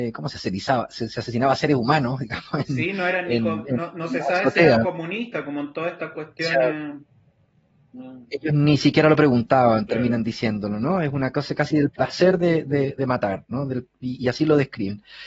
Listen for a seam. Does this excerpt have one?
no; 0 cuts

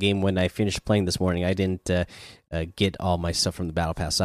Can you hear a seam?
no; 0 cuts

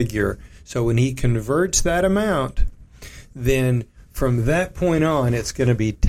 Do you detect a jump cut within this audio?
no; 0 cuts

